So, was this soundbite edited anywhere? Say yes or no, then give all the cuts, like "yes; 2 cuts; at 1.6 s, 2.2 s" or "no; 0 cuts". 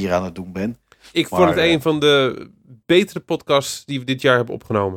no; 0 cuts